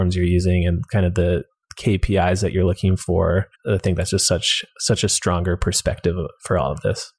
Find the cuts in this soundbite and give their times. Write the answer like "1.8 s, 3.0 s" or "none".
3.5 s